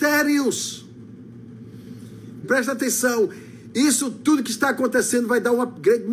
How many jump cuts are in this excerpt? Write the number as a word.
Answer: one